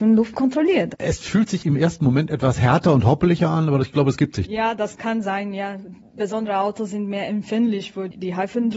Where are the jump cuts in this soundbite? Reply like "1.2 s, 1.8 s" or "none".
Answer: 0.9 s